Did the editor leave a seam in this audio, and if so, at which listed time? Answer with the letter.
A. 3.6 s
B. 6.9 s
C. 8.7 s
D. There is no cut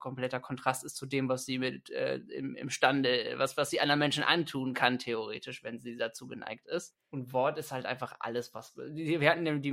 B